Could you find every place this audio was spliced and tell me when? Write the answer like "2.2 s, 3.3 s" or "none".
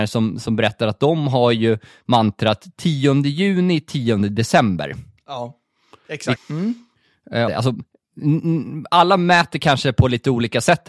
6.4 s, 7.5 s